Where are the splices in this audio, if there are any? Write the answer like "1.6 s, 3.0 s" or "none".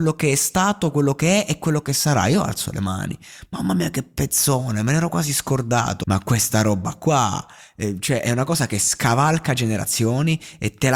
6.0 s